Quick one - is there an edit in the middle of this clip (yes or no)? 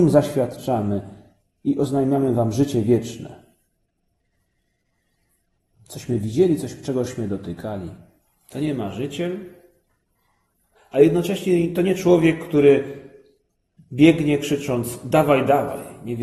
no